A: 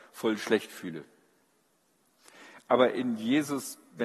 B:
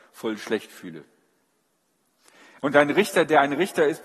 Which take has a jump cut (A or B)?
B